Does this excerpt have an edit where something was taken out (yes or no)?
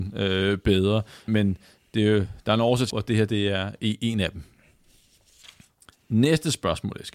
yes